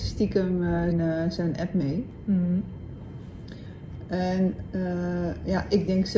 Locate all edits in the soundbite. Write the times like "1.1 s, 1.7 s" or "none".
0.9 s